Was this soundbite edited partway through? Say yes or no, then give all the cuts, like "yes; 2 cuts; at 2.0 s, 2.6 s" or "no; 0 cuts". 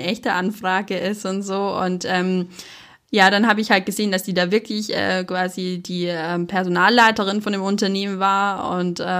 no; 0 cuts